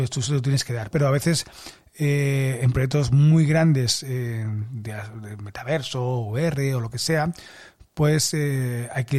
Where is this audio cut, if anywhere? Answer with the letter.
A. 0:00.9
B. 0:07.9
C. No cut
A